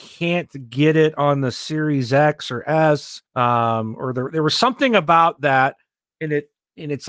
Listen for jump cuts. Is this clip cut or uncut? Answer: cut